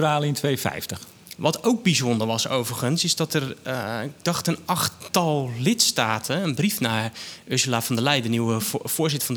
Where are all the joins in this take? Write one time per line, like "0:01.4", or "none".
0:01.4